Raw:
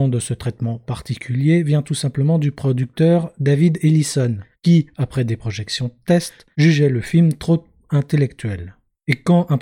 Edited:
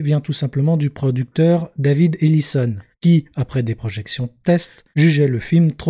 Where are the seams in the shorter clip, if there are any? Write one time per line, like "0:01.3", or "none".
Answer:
none